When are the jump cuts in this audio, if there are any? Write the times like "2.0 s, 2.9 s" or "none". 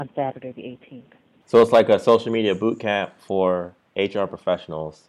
1.4 s